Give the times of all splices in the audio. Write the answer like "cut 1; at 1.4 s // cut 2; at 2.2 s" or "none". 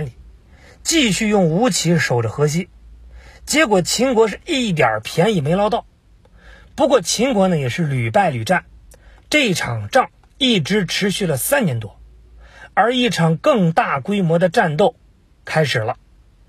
none